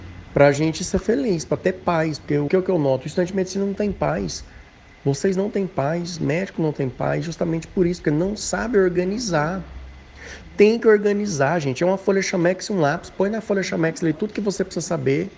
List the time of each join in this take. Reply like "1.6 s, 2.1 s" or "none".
2.5 s